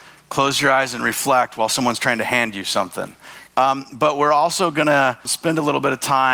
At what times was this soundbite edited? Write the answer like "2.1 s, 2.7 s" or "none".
3.5 s, 5.3 s